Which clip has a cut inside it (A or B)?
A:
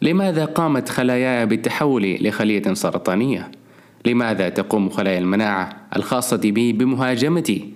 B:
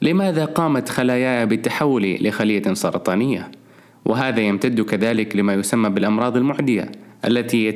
B